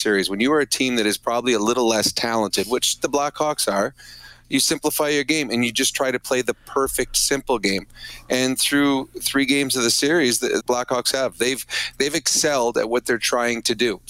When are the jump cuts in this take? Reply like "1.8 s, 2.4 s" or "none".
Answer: 10.6 s, 11.9 s